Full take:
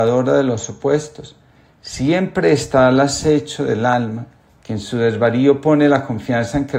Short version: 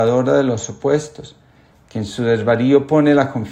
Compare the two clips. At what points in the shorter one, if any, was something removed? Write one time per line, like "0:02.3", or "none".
0:01.7